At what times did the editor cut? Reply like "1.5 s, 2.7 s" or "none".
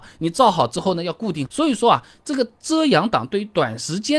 1.5 s